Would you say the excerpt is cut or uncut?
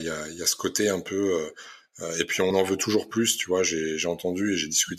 cut